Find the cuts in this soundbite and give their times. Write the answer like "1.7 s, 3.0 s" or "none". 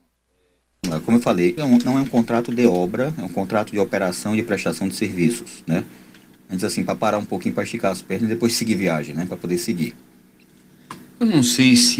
1.6 s, 6.4 s